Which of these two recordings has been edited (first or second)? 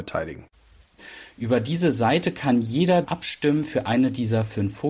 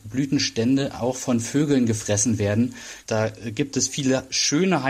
second